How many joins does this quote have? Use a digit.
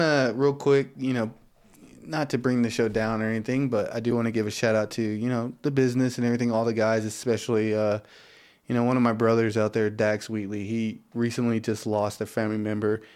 0